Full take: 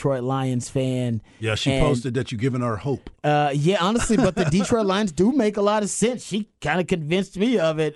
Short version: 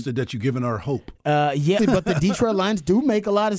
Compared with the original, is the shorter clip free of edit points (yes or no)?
no